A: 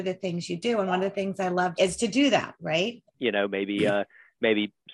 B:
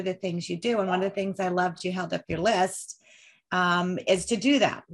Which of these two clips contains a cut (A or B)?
A